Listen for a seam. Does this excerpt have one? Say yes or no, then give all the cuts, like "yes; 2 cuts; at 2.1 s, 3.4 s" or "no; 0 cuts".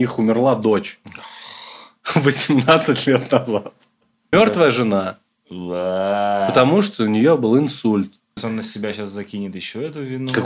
yes; 2 cuts; at 4.3 s, 8.4 s